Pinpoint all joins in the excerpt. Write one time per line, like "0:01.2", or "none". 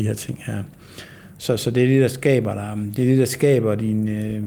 0:01.4